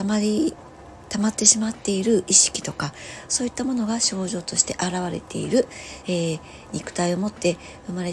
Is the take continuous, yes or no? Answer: yes